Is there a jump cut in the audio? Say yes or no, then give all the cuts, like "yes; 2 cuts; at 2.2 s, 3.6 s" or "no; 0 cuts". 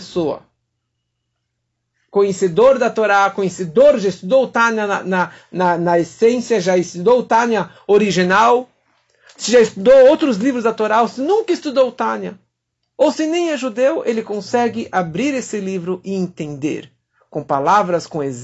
no; 0 cuts